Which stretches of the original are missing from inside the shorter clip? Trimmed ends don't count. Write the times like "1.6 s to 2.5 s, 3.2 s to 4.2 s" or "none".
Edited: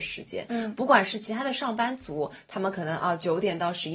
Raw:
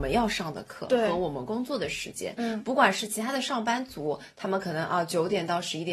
none